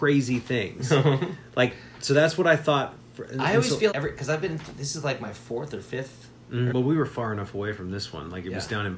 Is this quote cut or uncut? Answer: cut